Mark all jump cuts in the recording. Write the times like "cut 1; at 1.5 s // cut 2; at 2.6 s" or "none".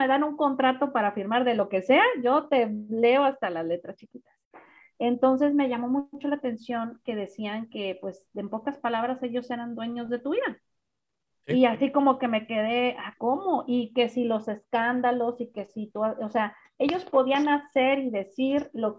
cut 1; at 11.3 s // cut 2; at 13.2 s